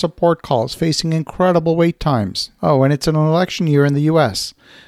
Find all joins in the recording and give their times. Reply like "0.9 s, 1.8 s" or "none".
2.6 s